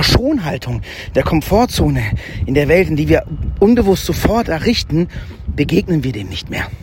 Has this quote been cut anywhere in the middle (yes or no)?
no